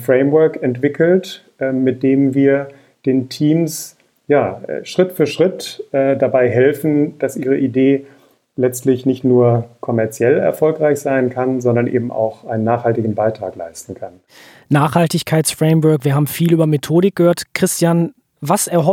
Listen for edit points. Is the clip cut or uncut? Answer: uncut